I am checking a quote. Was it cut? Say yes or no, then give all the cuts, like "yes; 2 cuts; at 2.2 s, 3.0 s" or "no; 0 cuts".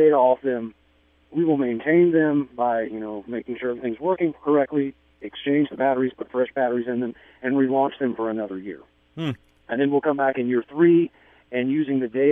no; 0 cuts